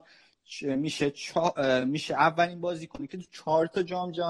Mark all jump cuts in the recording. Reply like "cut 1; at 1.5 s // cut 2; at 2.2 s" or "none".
none